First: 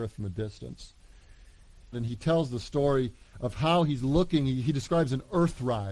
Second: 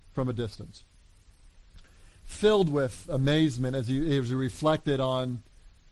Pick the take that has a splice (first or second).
first